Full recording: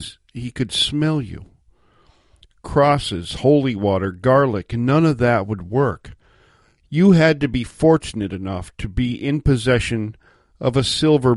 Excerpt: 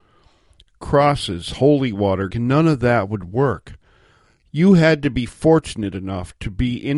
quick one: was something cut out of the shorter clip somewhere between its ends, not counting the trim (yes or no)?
yes